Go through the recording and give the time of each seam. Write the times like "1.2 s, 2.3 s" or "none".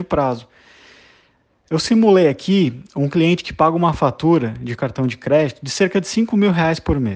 none